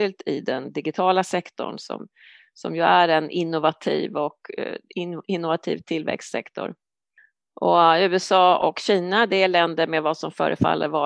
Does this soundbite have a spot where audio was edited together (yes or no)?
no